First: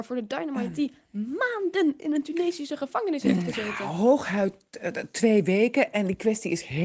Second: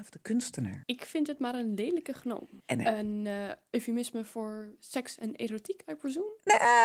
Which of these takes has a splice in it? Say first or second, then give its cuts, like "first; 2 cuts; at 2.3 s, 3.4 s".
second; 1 cut; at 2.6 s